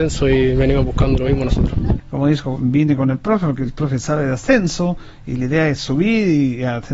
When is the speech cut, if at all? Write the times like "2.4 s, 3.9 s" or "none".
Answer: 2.0 s